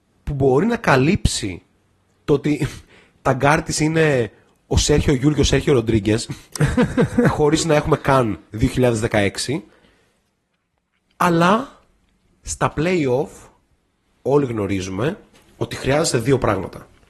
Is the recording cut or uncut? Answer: uncut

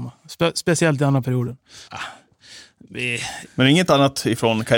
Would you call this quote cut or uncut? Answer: cut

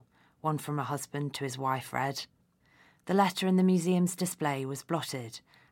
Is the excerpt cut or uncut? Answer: uncut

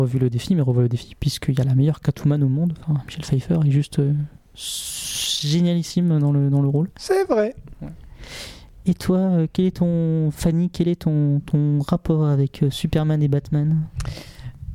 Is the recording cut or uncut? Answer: uncut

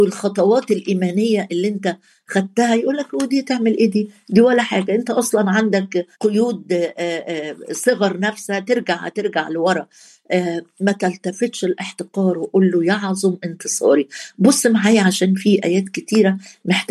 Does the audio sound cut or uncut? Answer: cut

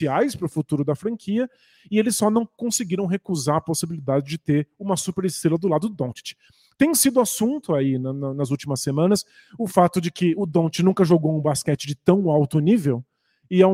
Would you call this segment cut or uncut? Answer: uncut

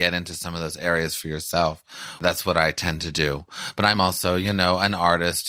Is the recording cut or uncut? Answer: uncut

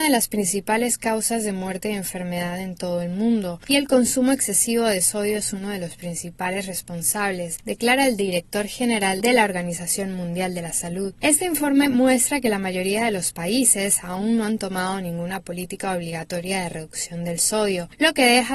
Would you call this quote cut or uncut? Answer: uncut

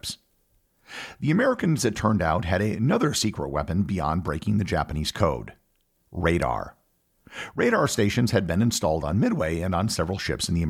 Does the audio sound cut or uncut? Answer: uncut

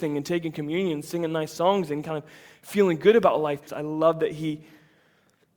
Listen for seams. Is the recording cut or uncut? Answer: cut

